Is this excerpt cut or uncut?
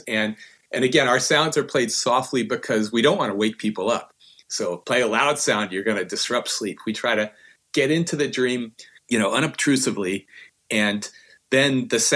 uncut